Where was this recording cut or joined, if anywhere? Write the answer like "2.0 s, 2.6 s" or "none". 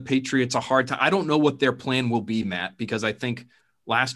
none